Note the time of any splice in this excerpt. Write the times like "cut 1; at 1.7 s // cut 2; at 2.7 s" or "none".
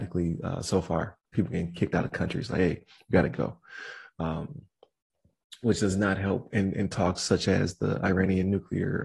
cut 1; at 1.3 s